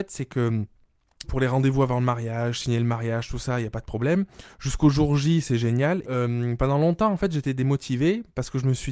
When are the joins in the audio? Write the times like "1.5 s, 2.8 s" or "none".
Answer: 1.2 s, 6.0 s